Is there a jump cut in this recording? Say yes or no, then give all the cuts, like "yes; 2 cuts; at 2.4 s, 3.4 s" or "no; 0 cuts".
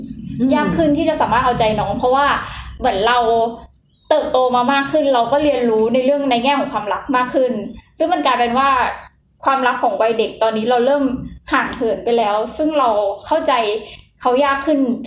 no; 0 cuts